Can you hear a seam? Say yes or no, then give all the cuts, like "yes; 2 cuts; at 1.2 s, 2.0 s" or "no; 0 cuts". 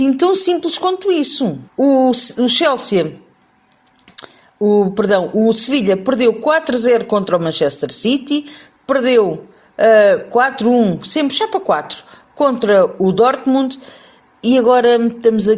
yes; 2 cuts; at 1.7 s, 13.0 s